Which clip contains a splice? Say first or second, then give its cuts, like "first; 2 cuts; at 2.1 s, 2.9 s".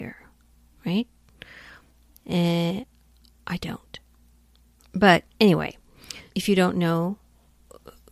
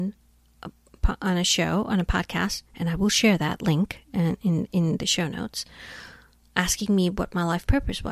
first; 3 cuts; at 2.2 s, 4.8 s, 6.3 s